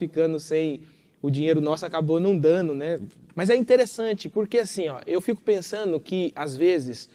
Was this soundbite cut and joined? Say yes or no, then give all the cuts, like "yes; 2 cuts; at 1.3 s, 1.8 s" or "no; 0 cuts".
yes; 1 cut; at 3.3 s